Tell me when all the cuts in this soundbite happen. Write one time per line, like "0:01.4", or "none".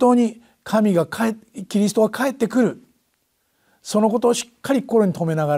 none